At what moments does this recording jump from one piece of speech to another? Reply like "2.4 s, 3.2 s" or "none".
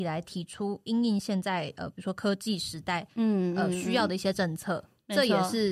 none